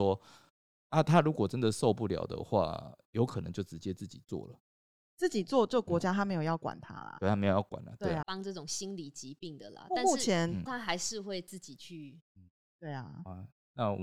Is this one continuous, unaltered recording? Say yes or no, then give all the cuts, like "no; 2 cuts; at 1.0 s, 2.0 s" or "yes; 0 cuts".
no; 3 cuts; at 8.2 s, 10.7 s, 12.2 s